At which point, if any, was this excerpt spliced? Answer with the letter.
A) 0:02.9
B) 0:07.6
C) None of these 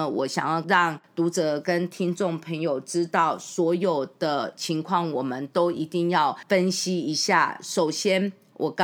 C